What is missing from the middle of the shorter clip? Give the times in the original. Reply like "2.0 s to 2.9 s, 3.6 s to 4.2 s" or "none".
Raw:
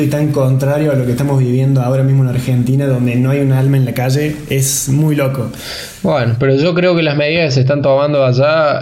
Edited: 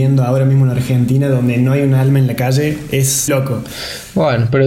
4.9 s to 5.2 s